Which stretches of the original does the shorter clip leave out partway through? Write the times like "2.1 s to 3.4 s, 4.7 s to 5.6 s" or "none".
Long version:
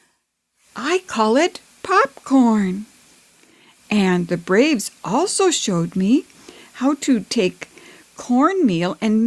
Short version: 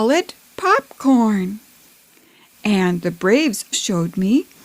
5.0 s to 5.5 s